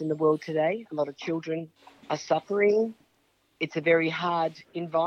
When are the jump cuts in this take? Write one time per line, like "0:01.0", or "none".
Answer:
none